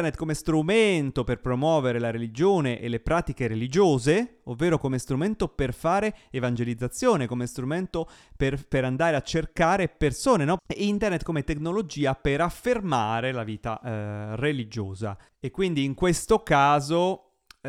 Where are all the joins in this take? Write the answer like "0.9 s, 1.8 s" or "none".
10.6 s